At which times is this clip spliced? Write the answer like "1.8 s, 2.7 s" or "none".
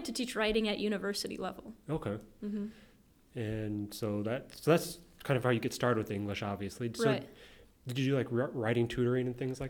none